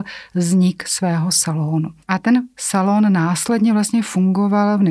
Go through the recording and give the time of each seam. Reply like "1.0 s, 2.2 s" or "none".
2.0 s